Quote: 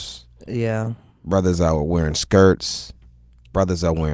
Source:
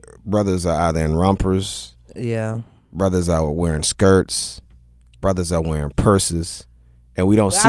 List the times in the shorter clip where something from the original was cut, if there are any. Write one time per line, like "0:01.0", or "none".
none